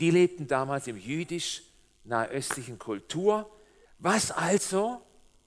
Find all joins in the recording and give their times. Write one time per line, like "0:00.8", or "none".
0:03.8